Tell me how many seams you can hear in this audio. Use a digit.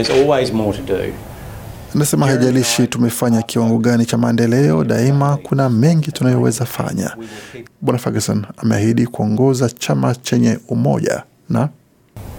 1